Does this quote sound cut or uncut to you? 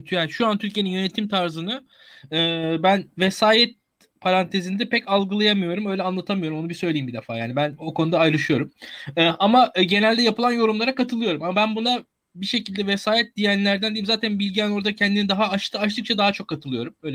uncut